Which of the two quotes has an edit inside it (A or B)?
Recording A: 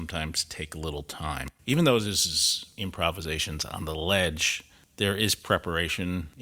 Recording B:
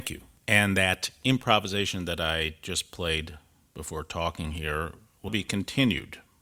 B